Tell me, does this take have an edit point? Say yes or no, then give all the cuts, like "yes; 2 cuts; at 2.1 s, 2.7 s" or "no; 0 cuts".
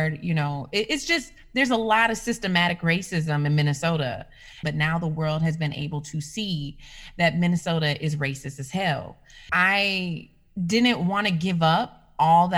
yes; 2 cuts; at 4.6 s, 9.5 s